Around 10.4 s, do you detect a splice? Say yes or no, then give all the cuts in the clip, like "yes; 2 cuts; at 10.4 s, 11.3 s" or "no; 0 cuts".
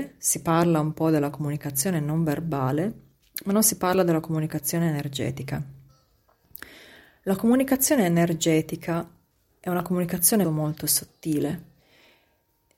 yes; 1 cut; at 10.4 s